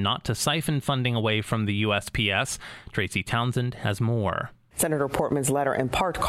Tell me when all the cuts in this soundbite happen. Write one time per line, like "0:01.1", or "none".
none